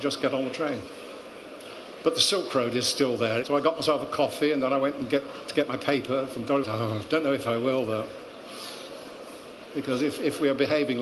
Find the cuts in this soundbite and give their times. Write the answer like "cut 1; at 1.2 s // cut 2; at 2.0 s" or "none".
cut 1; at 3.4 s // cut 2; at 6.6 s // cut 3; at 9.7 s